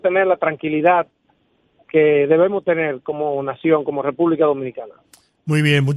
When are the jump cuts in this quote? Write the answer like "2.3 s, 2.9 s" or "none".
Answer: none